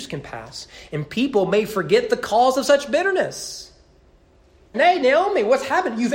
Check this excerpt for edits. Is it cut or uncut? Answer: cut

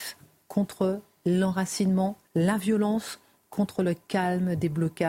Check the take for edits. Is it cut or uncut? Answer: cut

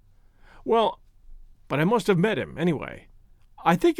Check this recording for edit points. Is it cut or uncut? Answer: cut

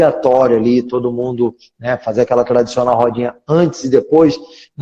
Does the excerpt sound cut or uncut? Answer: uncut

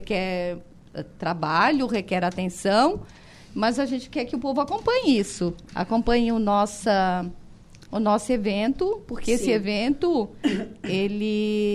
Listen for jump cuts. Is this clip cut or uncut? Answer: uncut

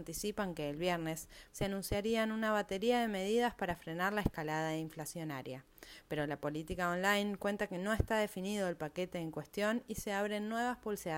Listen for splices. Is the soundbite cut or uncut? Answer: cut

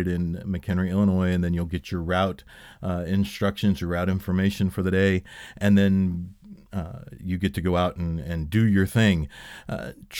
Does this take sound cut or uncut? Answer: uncut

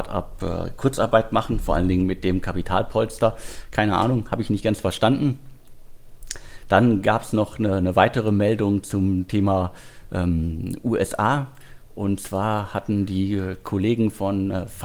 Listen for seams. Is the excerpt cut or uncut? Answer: uncut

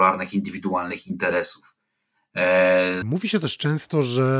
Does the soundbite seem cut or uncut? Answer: cut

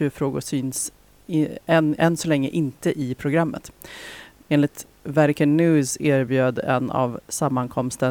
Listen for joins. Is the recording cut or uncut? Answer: cut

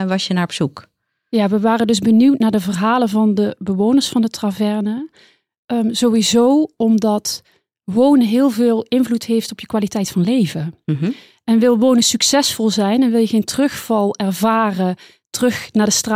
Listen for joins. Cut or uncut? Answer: uncut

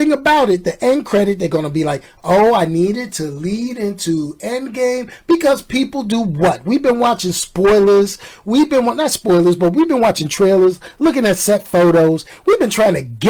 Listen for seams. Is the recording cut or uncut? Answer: uncut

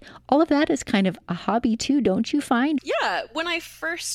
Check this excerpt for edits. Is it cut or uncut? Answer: cut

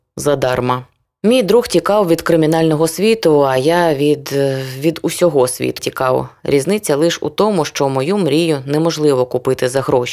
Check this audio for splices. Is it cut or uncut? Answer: cut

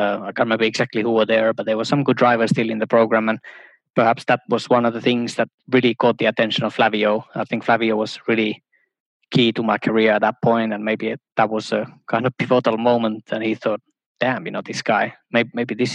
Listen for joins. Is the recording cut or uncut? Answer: uncut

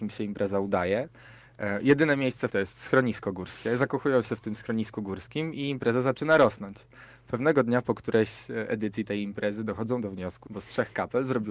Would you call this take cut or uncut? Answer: cut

